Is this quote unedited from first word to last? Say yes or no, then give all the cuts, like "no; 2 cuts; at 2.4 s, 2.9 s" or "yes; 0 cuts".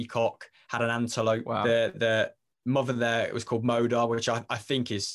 yes; 0 cuts